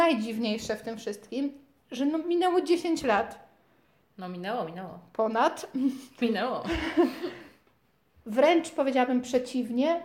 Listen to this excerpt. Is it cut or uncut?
cut